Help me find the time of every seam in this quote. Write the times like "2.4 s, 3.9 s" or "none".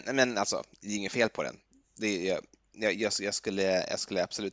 none